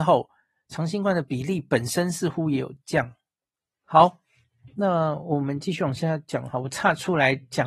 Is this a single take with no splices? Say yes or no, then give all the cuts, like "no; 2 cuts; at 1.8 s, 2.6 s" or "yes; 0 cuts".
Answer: no; 1 cut; at 3.7 s